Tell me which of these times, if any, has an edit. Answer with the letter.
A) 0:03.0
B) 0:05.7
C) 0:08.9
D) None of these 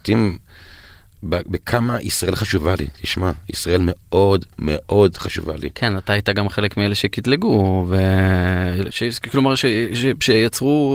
C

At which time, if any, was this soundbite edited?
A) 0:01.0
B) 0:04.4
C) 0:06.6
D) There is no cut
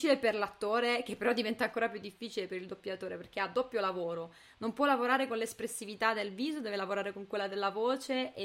D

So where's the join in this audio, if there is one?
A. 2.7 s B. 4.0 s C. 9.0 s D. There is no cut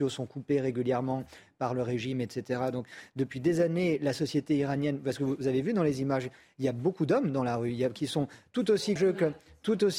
C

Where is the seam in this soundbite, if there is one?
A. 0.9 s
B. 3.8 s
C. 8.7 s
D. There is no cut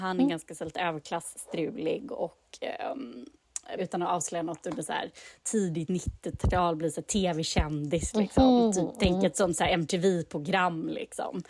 B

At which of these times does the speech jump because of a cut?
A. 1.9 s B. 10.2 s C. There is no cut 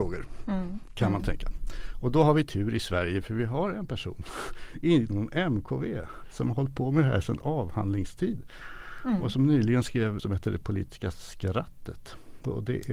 B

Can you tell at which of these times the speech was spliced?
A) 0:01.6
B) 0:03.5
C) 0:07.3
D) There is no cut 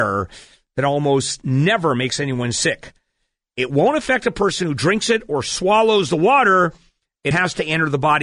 C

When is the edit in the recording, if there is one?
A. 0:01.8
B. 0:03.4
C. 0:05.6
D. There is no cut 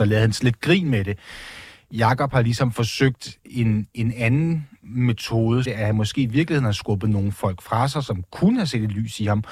C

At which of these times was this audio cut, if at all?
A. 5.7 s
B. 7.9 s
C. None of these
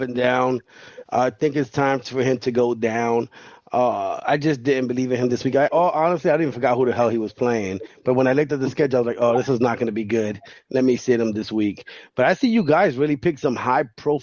A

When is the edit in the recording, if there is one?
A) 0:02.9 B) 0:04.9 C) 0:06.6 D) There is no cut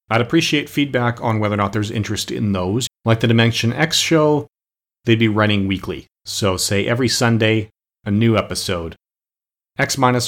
A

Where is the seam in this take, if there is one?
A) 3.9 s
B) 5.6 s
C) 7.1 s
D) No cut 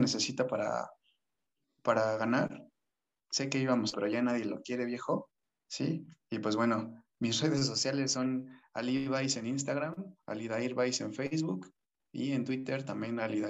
A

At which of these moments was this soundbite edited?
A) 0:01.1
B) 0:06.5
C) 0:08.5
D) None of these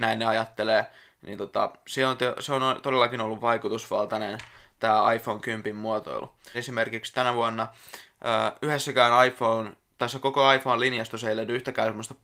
B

